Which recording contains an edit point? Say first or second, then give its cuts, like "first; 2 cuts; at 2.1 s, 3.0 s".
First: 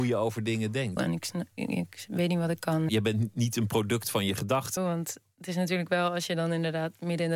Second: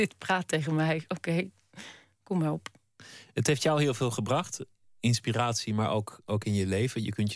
first; 3 cuts; at 1.0 s, 2.9 s, 4.8 s